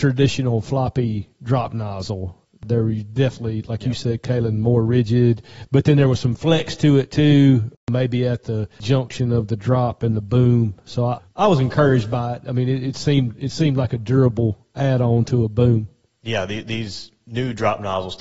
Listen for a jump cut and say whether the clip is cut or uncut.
uncut